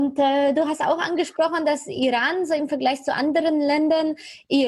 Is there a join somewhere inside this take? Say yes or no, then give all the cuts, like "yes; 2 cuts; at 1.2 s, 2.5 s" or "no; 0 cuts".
no; 0 cuts